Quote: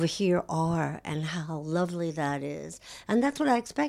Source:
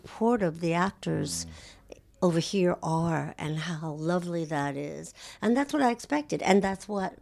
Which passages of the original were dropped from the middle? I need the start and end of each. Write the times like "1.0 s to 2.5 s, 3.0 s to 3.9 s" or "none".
none